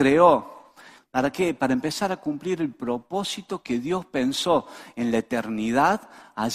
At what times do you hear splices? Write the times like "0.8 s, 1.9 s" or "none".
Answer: 1.0 s